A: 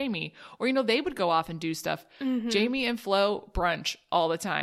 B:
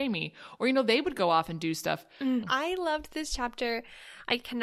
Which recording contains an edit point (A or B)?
B